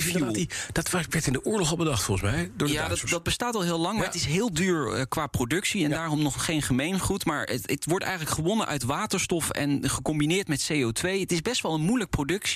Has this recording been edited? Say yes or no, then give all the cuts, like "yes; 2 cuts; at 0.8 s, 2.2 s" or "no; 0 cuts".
no; 0 cuts